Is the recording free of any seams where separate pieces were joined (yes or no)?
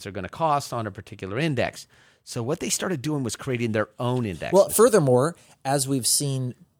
yes